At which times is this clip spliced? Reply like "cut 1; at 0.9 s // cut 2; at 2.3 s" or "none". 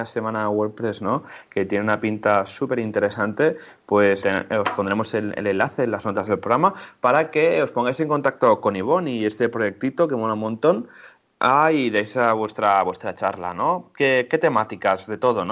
cut 1; at 4.2 s